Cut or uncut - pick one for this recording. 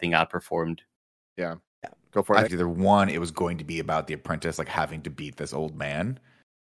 cut